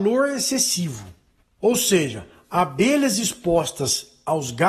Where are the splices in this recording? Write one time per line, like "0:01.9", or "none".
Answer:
none